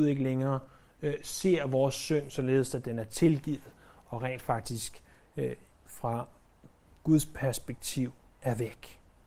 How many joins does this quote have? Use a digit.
0